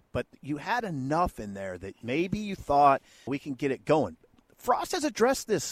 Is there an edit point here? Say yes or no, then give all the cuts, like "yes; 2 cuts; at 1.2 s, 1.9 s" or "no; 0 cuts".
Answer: yes; 1 cut; at 3.3 s